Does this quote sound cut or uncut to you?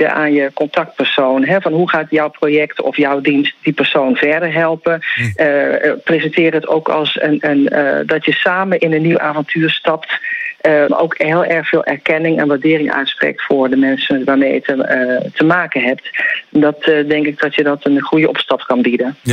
cut